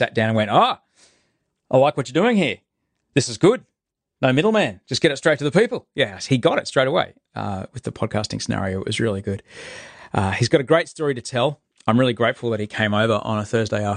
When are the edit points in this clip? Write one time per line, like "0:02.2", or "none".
none